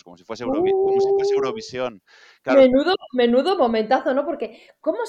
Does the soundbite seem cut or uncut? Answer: uncut